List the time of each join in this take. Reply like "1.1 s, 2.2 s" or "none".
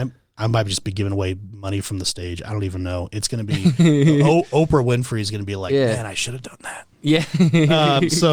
none